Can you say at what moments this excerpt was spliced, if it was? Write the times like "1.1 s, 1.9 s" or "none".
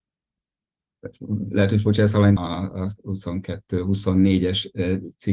2.4 s